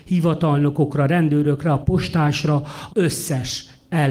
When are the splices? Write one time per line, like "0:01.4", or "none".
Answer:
0:02.9